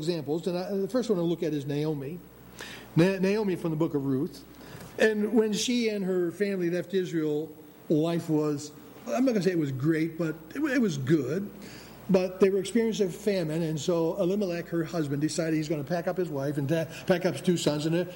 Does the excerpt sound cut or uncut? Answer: cut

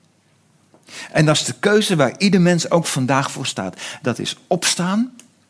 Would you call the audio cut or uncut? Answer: uncut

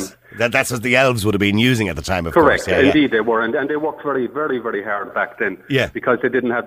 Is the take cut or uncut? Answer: uncut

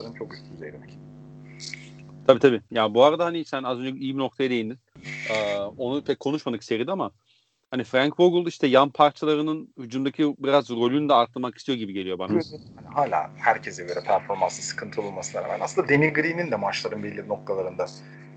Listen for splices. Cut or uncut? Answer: cut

